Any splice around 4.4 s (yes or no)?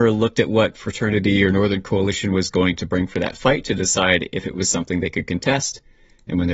no